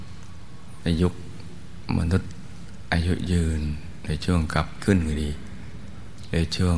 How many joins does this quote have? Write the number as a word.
one